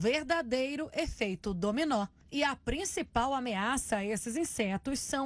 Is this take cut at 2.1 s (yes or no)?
no